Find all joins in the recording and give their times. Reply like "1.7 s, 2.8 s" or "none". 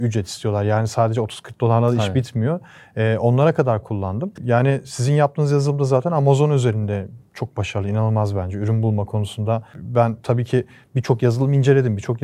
4.4 s